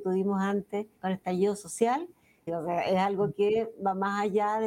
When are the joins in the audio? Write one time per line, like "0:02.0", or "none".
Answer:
0:01.0
0:02.5